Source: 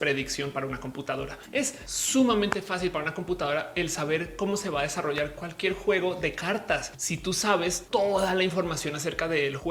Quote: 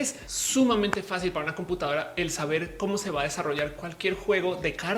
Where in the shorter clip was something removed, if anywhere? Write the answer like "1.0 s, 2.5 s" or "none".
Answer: none